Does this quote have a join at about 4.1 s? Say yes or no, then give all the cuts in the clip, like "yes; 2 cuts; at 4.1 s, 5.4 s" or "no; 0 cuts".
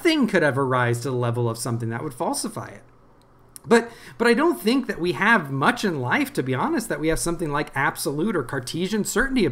no; 0 cuts